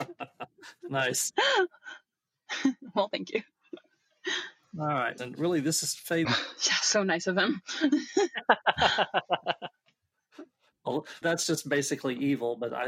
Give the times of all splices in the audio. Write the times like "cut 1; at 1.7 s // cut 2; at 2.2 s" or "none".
cut 1; at 5.2 s // cut 2; at 6.2 s // cut 3; at 11.2 s